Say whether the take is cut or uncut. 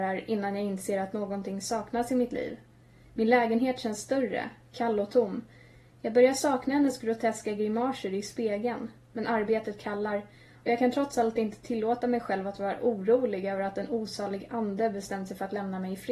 cut